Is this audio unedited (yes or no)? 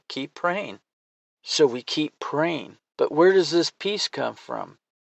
no